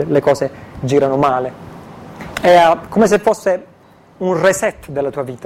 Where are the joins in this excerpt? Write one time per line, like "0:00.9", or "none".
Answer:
0:02.3